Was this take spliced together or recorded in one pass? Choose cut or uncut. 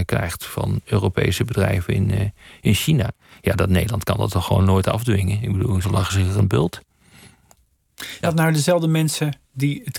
cut